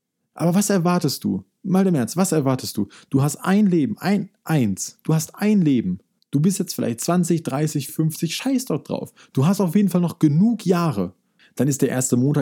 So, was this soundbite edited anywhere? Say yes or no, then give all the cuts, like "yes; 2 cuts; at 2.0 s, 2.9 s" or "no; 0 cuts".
yes; 2 cuts; at 7.9 s, 11.4 s